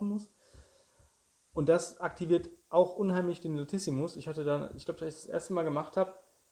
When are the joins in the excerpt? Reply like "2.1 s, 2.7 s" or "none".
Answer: none